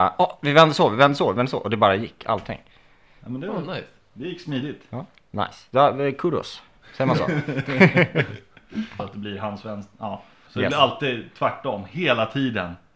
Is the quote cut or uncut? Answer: cut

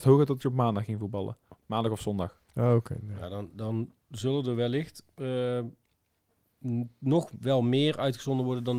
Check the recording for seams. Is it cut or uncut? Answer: uncut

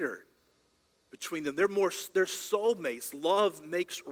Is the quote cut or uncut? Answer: uncut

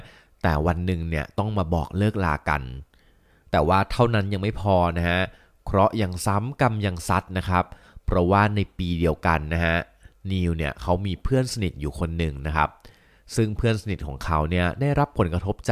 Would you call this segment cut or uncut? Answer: uncut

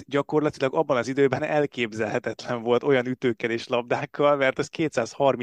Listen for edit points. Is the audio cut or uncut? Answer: uncut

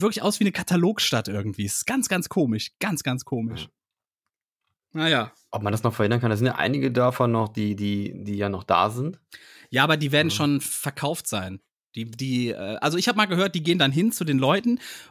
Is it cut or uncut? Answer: uncut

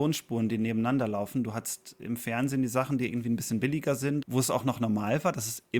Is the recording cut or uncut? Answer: cut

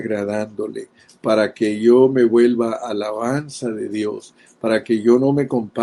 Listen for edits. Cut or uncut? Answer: uncut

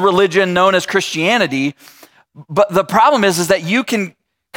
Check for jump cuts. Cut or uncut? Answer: uncut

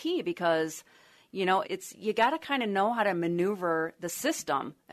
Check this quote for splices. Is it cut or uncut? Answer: cut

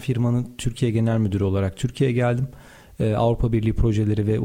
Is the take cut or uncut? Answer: uncut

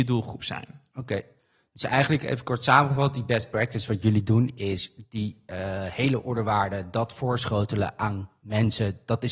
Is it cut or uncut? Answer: uncut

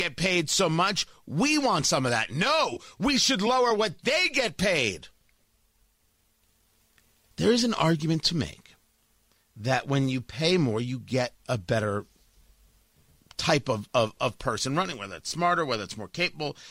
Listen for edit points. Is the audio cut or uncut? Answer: cut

